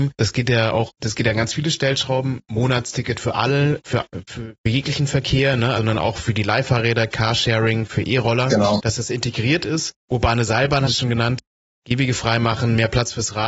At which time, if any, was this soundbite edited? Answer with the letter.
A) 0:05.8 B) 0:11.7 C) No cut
A